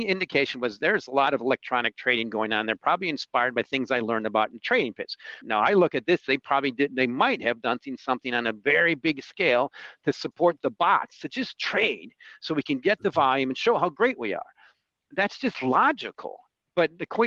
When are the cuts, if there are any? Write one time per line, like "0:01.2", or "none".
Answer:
0:05.4